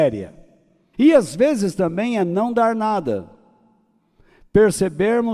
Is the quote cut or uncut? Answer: cut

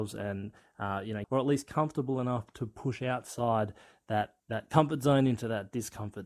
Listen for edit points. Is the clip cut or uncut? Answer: cut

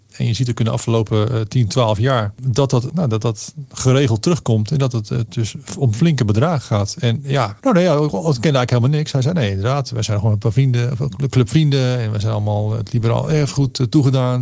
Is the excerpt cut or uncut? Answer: cut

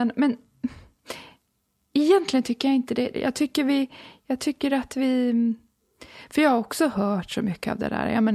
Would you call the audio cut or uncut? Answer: cut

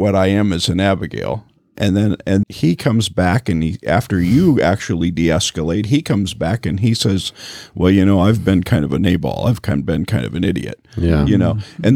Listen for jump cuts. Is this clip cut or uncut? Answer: cut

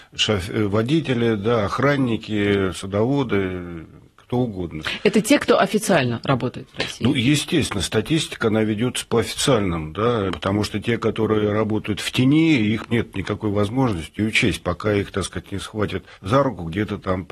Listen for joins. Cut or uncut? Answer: cut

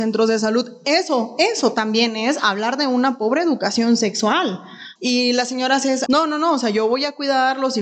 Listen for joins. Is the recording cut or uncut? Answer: cut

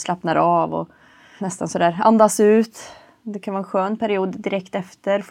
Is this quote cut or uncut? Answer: cut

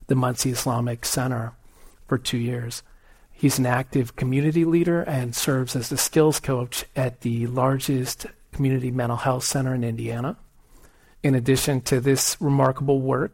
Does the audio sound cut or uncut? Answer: cut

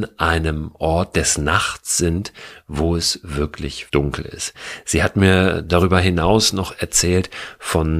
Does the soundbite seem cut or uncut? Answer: cut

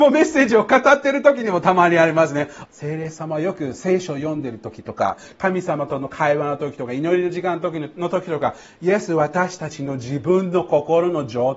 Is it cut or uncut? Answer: cut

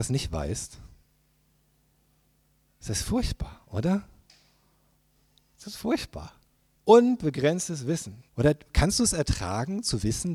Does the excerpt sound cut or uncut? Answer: cut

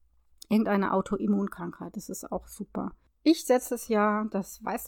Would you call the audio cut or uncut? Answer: cut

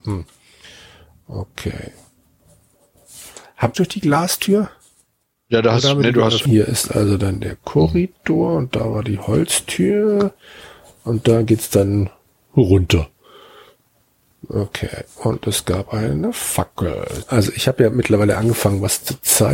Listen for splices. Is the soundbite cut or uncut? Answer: cut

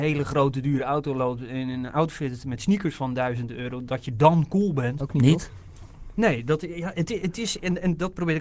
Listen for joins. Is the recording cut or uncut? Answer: cut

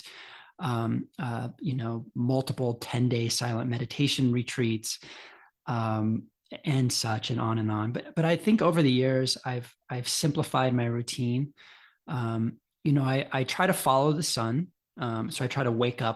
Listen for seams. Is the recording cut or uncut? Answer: uncut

